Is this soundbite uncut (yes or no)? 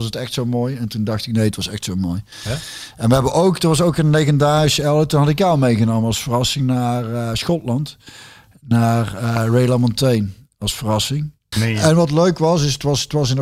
no